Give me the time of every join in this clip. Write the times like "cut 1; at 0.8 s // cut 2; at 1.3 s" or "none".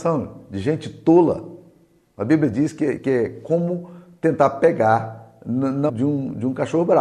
cut 1; at 3.0 s // cut 2; at 5.9 s